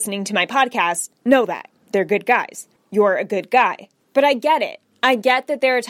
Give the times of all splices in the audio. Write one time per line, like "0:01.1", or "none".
none

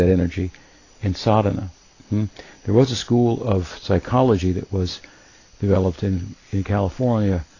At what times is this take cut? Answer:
none

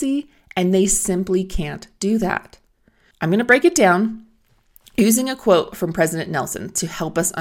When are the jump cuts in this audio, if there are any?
0:03.1

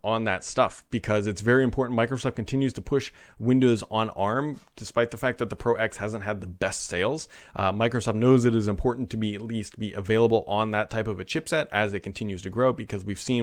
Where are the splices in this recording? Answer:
none

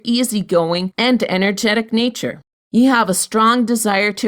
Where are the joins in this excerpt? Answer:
0:00.9
0:02.6

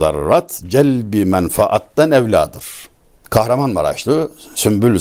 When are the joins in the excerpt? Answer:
0:03.2

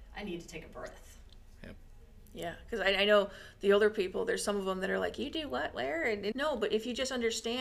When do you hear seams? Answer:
0:06.3

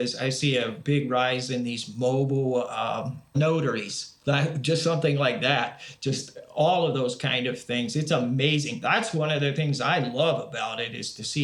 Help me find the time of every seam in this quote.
none

